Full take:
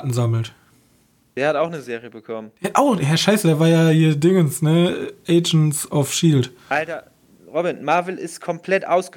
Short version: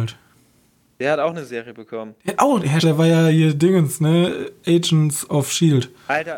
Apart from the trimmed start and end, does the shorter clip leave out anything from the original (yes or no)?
yes